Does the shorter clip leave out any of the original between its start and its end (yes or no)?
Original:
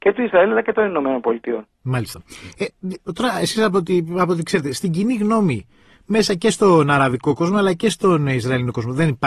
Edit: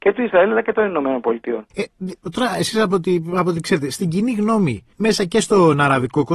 yes